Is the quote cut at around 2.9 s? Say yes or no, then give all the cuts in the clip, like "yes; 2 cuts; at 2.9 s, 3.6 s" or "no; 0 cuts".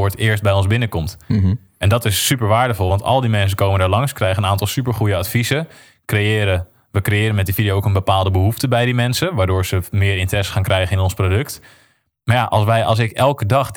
no; 0 cuts